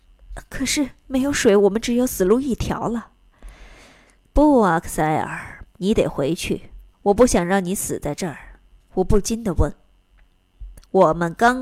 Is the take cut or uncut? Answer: cut